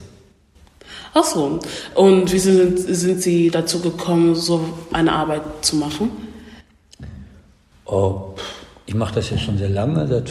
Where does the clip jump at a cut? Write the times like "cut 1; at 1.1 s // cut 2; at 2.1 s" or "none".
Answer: none